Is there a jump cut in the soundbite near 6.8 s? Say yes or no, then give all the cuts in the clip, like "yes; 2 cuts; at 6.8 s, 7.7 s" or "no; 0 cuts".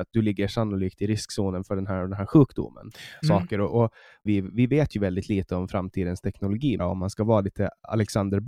yes; 3 cuts; at 3.2 s, 4.3 s, 6.8 s